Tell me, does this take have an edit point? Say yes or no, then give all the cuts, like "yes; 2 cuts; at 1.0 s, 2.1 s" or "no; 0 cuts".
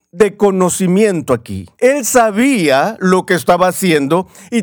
yes; 1 cut; at 1.8 s